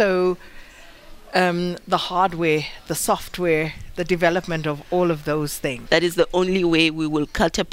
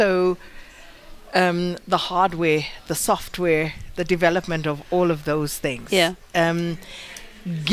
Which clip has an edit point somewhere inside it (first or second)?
first